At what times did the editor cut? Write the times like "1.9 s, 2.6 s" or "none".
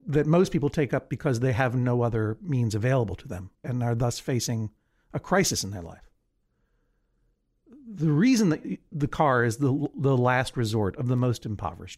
3.5 s